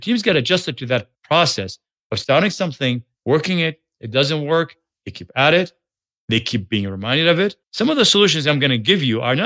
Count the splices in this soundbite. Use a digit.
1